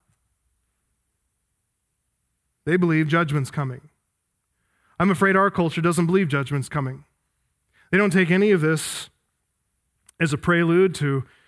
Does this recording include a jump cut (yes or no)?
no